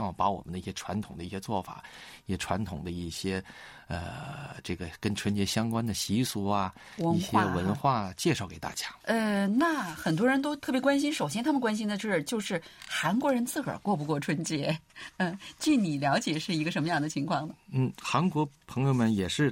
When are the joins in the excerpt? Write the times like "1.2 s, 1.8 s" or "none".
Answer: 9.0 s